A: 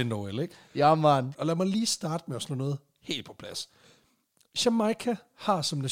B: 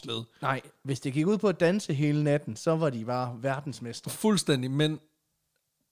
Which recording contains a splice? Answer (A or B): A